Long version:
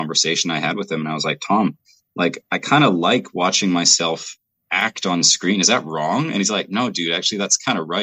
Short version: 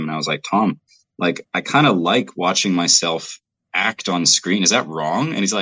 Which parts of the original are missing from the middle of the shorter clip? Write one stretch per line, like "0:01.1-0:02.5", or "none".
none